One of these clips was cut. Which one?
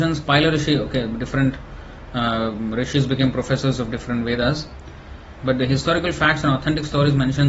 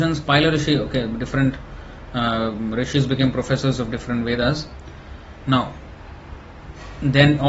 first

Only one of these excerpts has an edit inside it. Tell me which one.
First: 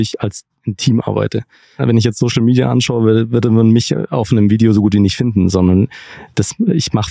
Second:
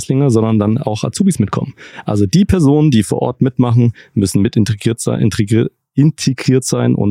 first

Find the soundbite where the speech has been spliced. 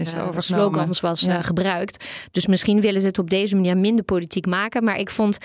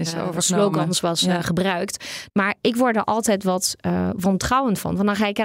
second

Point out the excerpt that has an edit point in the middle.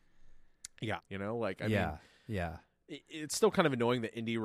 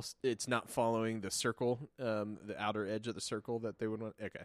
first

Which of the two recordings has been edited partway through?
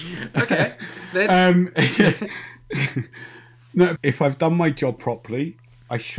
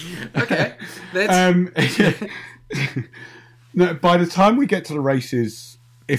first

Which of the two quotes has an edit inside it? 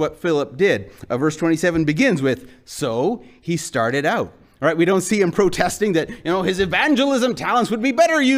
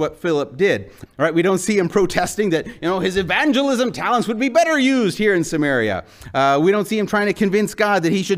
second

